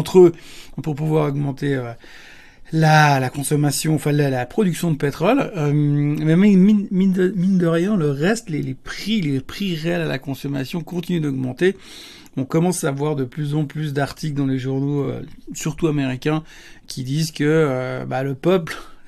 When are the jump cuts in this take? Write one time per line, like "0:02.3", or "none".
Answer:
none